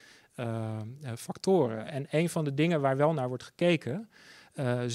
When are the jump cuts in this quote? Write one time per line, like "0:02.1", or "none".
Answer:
none